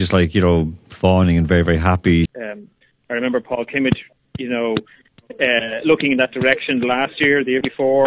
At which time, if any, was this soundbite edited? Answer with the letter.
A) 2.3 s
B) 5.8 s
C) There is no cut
A